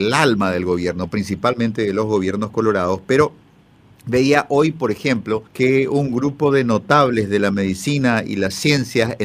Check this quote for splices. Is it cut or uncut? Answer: cut